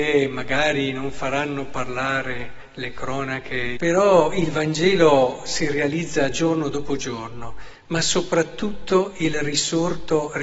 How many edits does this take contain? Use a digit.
1